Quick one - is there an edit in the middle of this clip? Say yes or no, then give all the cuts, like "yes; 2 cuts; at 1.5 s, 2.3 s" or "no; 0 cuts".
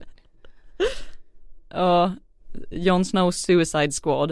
yes; 2 cuts; at 1.6 s, 2.7 s